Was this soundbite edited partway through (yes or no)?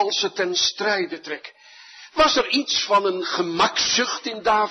no